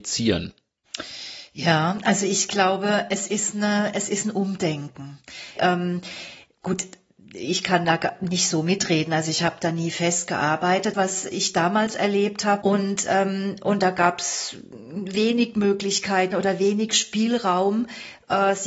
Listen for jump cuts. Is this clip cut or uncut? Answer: cut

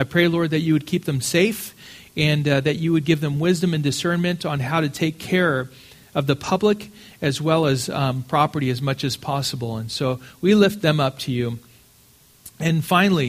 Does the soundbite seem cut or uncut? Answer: uncut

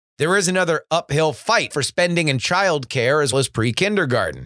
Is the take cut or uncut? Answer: cut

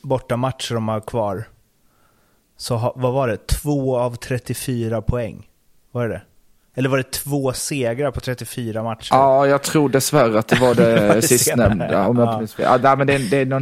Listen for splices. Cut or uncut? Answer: uncut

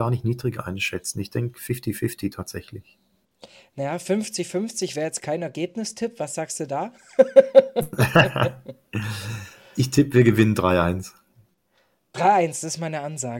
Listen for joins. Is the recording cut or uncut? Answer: uncut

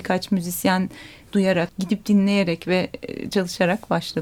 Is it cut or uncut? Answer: cut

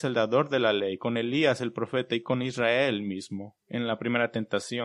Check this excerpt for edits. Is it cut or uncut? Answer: cut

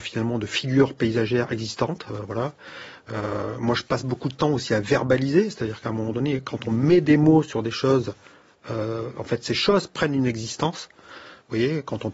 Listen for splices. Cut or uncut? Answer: uncut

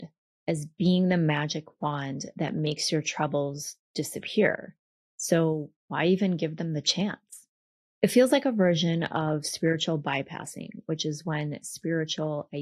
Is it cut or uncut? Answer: cut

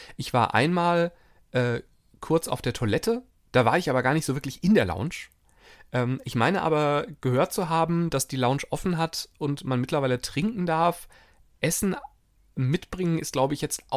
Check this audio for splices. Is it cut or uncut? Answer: uncut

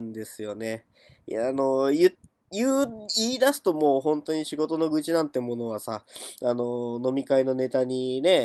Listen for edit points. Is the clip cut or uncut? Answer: uncut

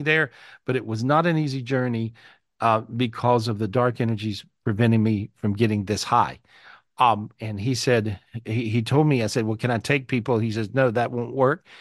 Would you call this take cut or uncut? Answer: uncut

